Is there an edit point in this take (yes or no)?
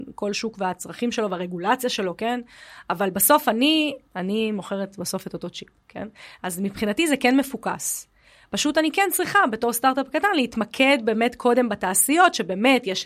yes